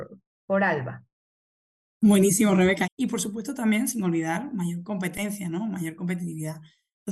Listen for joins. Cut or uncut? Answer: cut